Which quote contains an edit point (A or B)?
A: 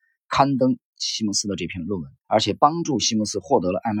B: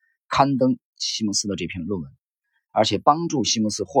A